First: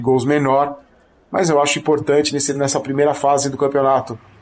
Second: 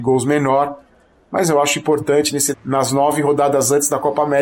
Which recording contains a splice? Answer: second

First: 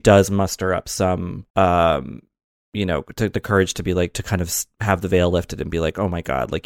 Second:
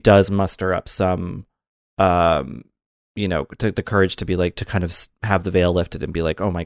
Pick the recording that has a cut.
first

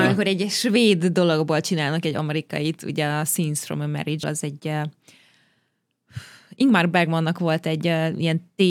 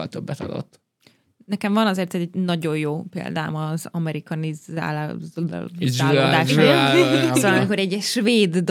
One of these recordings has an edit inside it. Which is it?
first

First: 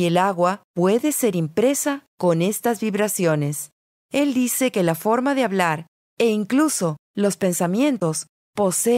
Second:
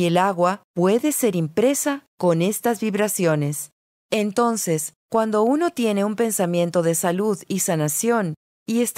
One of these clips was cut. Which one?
first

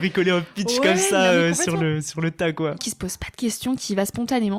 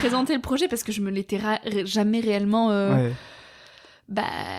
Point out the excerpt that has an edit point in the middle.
first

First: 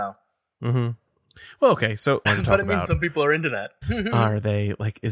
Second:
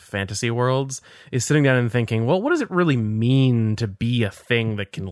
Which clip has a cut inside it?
first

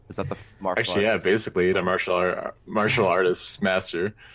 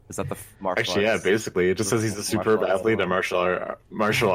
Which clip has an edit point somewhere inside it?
first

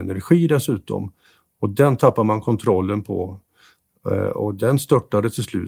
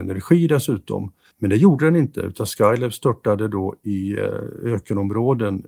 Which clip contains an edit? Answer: second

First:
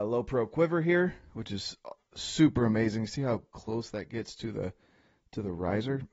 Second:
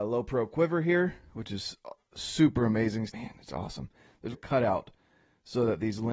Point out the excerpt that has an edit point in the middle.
second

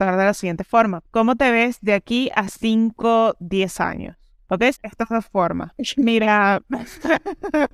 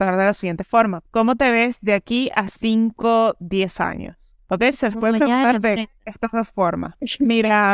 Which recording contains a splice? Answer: first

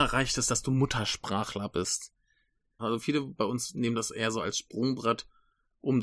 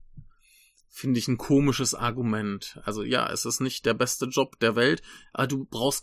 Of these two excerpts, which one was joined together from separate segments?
first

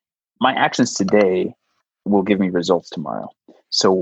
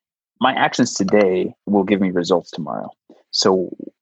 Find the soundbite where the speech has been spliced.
second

